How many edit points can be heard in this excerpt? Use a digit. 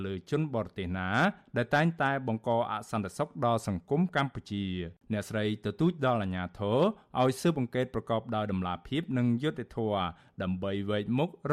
1